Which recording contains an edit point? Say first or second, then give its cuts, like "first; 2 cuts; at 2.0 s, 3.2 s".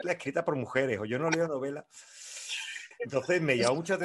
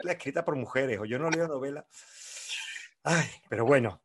first; 1 cut; at 2.9 s